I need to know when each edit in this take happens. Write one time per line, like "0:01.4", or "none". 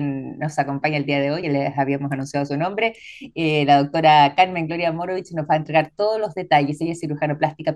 none

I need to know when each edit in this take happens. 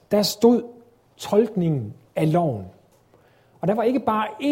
none

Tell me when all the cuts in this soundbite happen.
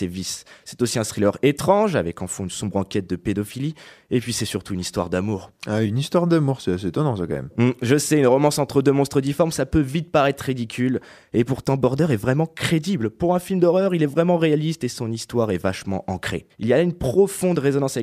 0:16.5

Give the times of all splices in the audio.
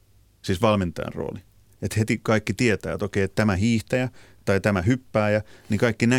none

